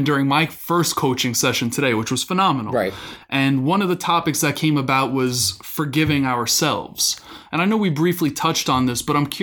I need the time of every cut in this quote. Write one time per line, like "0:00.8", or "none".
none